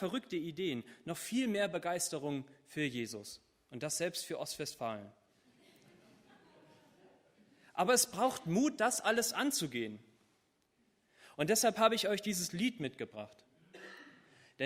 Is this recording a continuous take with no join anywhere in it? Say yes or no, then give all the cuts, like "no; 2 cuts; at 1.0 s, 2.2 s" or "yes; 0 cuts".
yes; 0 cuts